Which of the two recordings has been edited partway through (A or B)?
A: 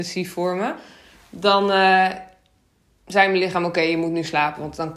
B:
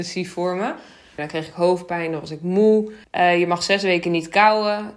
B